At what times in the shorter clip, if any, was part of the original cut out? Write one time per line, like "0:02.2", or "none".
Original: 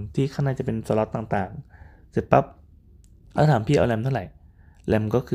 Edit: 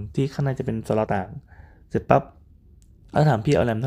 0:01.1